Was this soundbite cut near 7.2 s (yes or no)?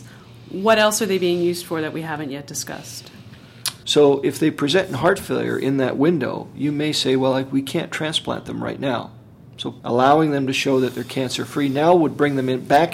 no